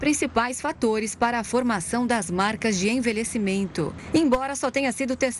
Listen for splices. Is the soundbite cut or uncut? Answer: uncut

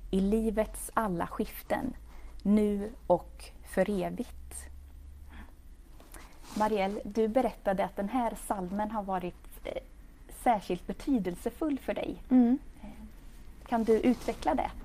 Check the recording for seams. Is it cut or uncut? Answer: uncut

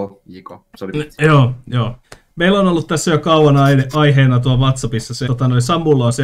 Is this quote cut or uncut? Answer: cut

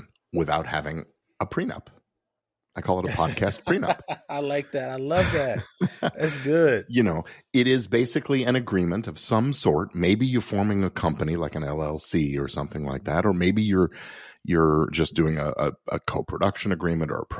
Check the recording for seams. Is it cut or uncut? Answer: uncut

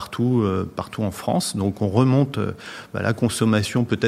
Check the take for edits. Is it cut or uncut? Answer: uncut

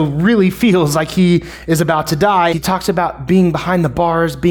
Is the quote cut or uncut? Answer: cut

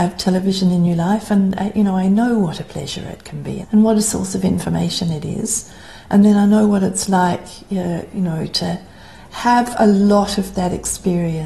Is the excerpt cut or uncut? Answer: cut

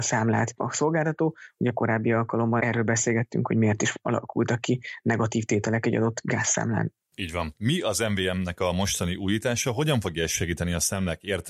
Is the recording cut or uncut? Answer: uncut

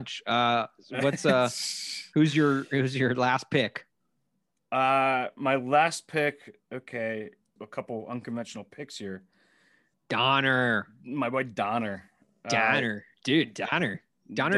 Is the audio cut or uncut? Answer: cut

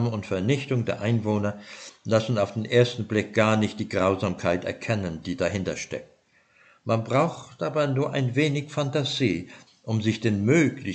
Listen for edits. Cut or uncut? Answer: cut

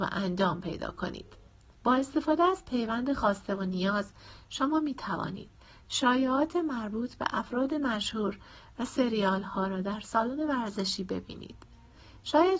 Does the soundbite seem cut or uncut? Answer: uncut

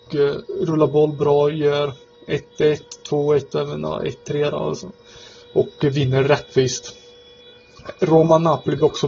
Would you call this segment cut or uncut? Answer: uncut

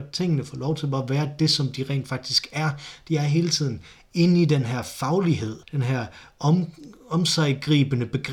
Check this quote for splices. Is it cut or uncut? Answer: cut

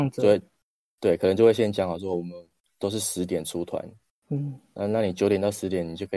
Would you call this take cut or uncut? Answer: uncut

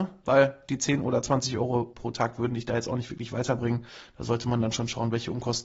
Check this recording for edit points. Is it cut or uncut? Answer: uncut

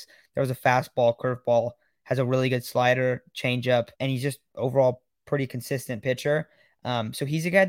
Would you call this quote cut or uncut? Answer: cut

